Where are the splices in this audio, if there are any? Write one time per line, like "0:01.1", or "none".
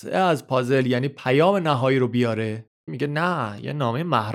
0:02.9